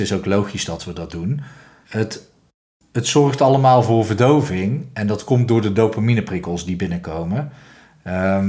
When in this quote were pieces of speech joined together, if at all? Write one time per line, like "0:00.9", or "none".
0:01.8

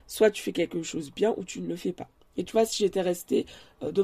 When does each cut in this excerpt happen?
0:02.1

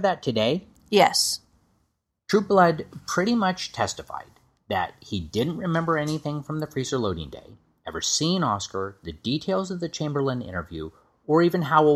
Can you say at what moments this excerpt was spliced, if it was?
none

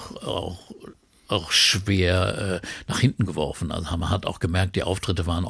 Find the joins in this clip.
none

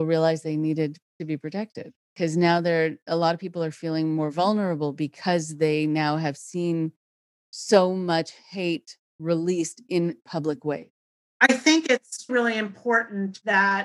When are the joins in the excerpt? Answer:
0:12.3

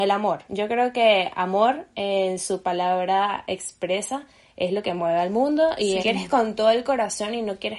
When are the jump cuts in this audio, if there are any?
0:06.0

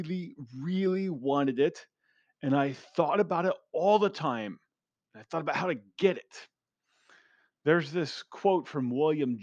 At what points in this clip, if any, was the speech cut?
none

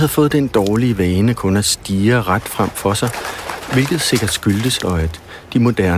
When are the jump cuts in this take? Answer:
0:04.8

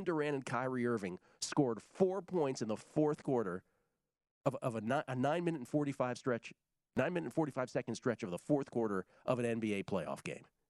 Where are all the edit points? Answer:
none

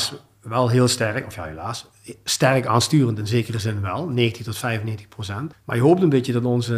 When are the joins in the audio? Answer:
0:05.5

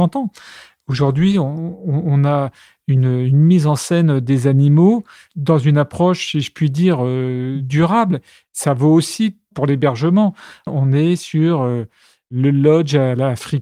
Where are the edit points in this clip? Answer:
0:10.7

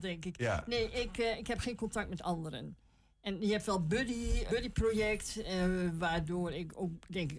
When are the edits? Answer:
0:04.5

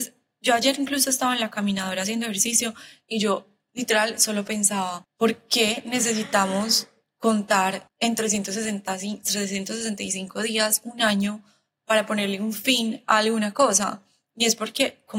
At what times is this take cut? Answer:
none

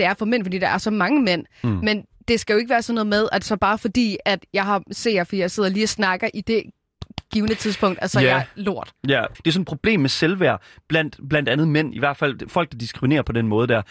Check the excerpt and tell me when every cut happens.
0:09.3

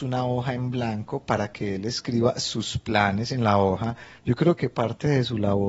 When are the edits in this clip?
0:04.2

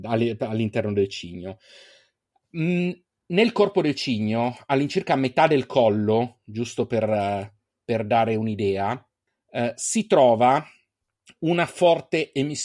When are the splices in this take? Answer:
none

